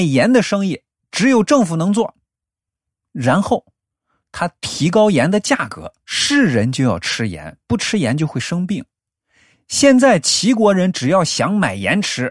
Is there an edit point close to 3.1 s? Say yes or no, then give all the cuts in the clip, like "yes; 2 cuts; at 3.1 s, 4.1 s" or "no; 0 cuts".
no; 1 cut; at 6.0 s